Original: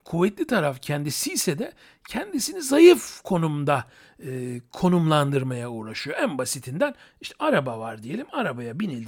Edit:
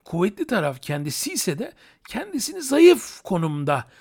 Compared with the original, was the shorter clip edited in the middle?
no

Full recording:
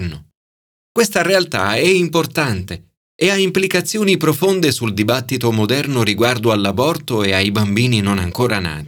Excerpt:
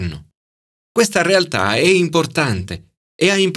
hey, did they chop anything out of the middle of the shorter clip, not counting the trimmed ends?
no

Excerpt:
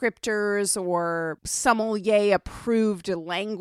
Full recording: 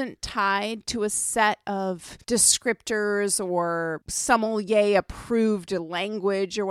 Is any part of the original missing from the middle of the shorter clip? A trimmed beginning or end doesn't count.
no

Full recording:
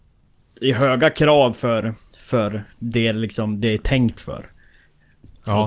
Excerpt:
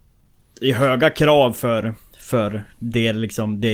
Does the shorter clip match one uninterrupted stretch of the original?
yes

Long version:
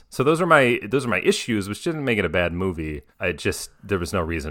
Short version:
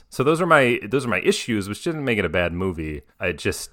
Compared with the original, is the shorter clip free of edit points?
yes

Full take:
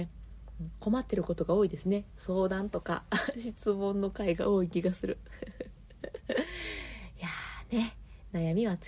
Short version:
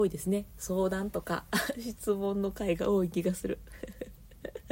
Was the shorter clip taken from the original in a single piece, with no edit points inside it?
yes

